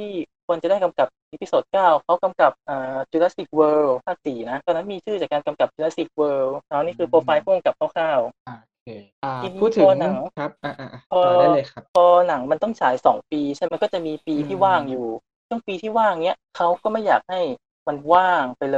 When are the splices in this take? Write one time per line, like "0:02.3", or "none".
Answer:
0:13.7